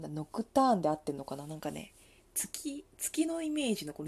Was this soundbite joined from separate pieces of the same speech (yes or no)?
no